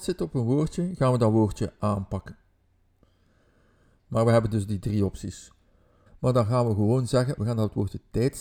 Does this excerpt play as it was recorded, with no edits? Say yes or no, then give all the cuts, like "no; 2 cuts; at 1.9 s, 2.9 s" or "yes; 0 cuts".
no; 3 cuts; at 4.0 s, 6.1 s, 7.4 s